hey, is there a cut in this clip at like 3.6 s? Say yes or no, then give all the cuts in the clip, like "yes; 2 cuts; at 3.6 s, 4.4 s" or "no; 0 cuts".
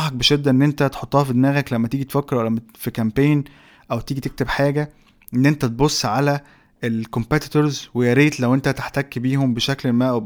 no; 0 cuts